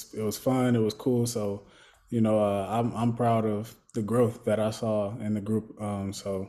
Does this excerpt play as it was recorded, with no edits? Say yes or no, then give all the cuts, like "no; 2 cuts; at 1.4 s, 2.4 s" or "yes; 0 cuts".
yes; 0 cuts